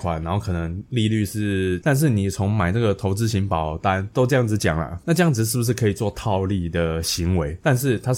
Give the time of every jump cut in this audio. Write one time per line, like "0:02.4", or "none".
0:01.8
0:05.0